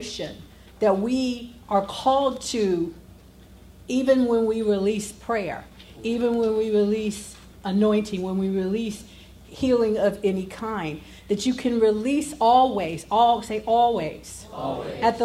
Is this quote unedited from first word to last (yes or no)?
no